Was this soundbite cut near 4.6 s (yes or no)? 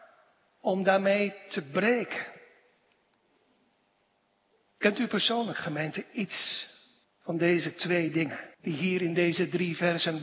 yes